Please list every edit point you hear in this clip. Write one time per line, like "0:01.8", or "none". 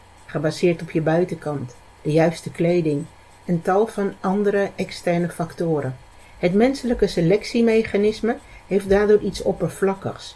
none